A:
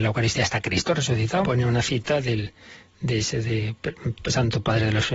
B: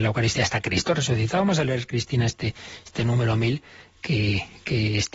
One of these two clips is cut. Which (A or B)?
A